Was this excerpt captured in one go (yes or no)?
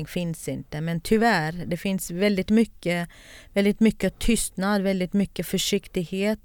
yes